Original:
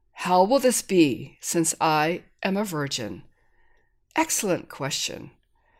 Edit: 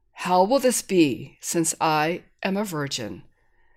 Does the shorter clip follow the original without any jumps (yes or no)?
yes